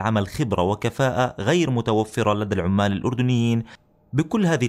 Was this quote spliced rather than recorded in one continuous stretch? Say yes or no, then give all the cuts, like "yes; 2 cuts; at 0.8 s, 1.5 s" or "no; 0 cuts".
no; 0 cuts